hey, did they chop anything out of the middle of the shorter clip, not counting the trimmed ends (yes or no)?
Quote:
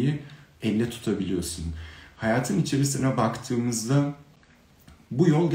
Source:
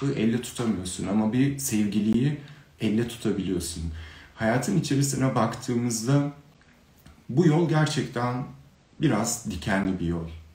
no